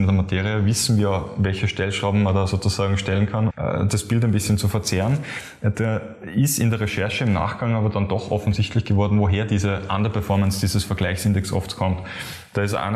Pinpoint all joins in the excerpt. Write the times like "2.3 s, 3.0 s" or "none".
3.5 s